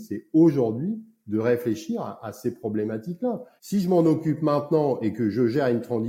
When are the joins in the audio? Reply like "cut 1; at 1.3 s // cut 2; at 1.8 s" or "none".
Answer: cut 1; at 3.6 s